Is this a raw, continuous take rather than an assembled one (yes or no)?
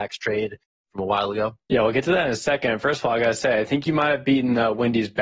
no